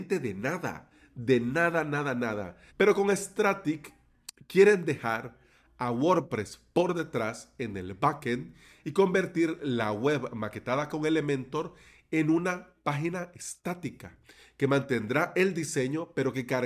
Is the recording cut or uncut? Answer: cut